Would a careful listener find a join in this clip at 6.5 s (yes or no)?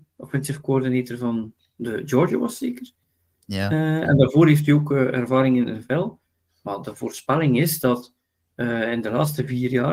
no